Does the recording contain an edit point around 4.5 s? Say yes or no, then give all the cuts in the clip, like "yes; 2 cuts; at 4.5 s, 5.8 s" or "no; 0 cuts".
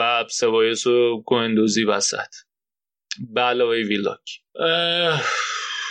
yes; 1 cut; at 4.5 s